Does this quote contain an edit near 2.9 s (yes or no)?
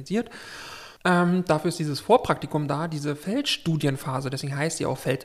no